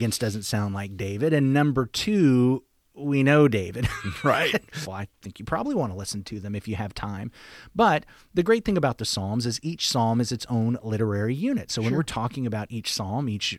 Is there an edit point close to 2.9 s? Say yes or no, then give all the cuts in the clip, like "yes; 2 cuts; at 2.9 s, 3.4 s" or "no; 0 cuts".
no; 1 cut; at 4.9 s